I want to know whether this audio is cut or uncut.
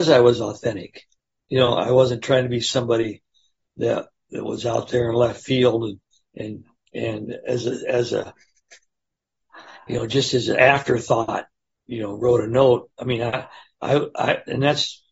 uncut